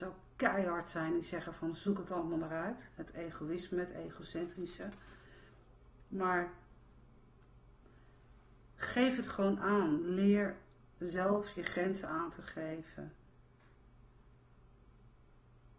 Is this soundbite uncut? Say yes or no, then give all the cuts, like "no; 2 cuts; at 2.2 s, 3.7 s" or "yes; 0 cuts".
yes; 0 cuts